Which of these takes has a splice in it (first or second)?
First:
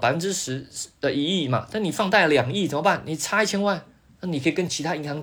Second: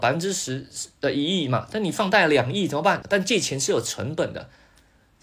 second